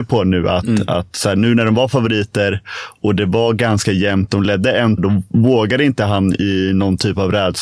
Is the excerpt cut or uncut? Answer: cut